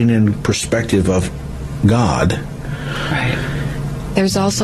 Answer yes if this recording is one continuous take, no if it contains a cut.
yes